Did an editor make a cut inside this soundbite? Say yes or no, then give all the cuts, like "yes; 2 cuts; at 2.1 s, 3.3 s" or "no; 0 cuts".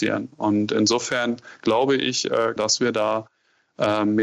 yes; 1 cut; at 2.6 s